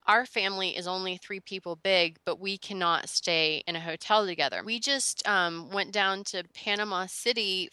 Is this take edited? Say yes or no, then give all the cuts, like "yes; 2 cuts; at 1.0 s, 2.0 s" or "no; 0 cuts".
yes; 1 cut; at 4.6 s